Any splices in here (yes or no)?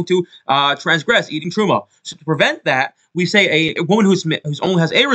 yes